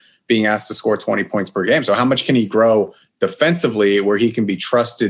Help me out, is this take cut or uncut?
uncut